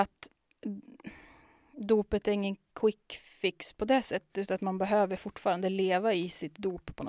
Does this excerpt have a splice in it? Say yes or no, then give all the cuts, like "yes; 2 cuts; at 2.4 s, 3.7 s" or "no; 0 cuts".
no; 0 cuts